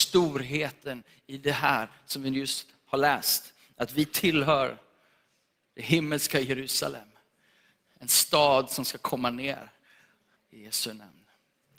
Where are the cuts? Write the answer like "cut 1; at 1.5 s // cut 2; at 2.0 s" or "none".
cut 1; at 10.4 s